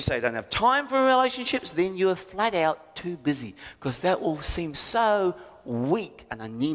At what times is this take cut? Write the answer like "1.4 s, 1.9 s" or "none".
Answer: none